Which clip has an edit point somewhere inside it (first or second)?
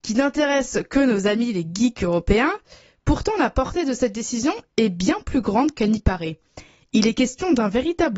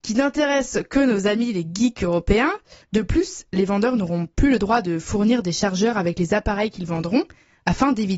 second